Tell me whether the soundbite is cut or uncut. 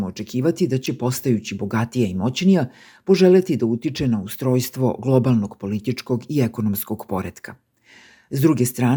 uncut